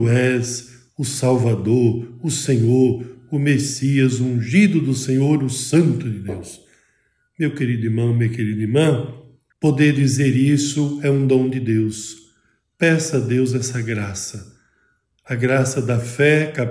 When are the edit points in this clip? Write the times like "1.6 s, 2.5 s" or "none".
none